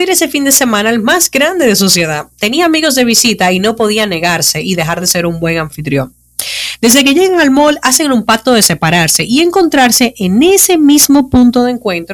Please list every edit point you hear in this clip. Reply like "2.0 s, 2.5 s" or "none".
none